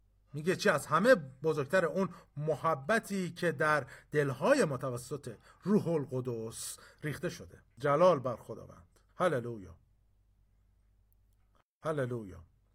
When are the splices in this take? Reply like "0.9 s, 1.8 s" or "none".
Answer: 7.7 s, 9.1 s